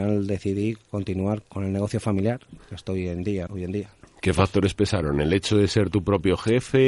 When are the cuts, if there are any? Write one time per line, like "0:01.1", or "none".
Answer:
0:01.4
0:03.5